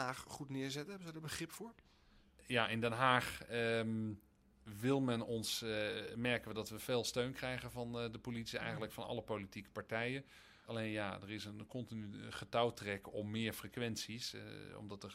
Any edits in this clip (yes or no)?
yes